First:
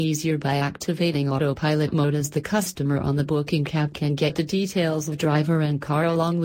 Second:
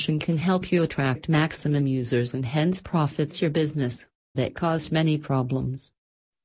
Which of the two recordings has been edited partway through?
second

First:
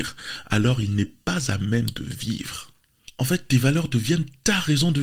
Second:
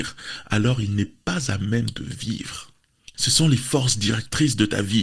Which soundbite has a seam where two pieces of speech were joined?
second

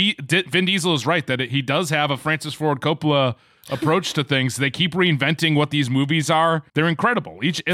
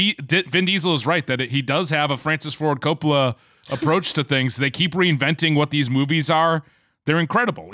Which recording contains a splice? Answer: first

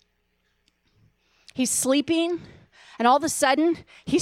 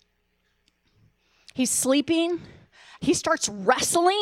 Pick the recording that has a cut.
second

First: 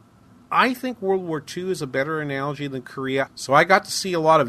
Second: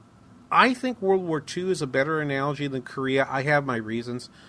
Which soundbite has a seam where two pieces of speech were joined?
first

